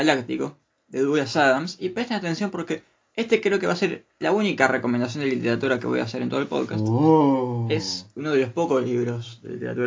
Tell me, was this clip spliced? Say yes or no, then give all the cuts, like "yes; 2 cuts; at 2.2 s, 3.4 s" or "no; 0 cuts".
no; 0 cuts